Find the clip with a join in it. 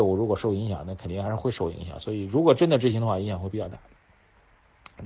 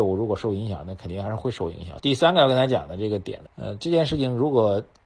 second; 2 cuts; at 2.0 s, 3.5 s

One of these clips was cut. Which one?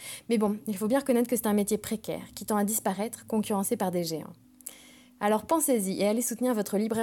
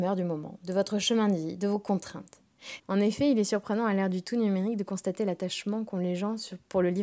second; 1 cut; at 2.8 s

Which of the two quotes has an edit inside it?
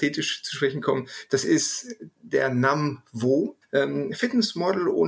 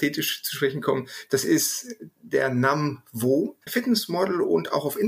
second; 1 cut; at 3.7 s

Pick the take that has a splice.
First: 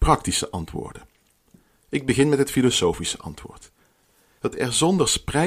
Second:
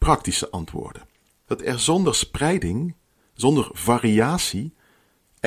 second; 1 cut; at 1.5 s

